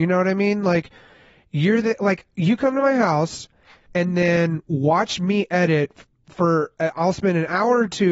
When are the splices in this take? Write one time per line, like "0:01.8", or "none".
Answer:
0:03.9